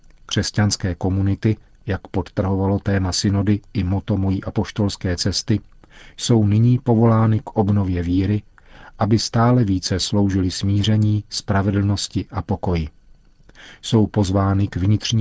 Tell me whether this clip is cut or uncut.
uncut